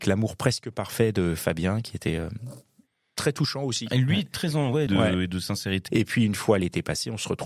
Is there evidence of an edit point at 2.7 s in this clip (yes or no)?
no